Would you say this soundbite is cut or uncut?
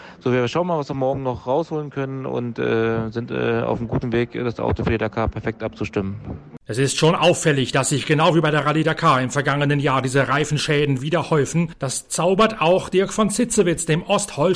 uncut